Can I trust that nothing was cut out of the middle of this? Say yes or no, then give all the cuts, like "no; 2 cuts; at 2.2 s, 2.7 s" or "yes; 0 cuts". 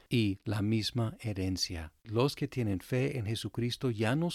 no; 1 cut; at 2.0 s